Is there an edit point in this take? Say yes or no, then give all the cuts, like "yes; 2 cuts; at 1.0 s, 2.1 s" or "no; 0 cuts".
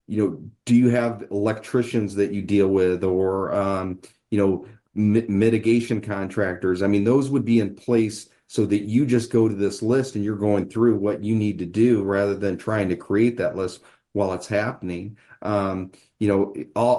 no; 0 cuts